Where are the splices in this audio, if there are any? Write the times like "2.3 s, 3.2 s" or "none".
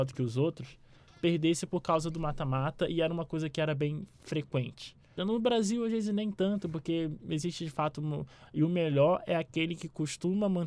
5.2 s, 8.4 s